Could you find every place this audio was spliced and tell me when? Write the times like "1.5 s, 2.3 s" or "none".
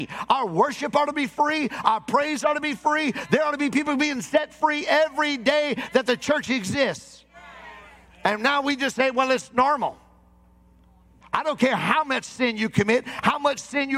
11.2 s